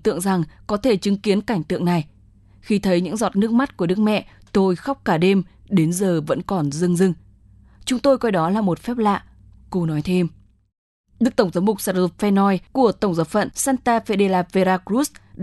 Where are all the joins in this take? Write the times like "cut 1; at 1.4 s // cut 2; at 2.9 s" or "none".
none